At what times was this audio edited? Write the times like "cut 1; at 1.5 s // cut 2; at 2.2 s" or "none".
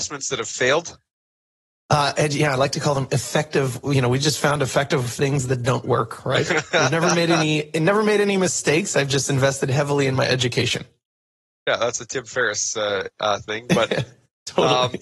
none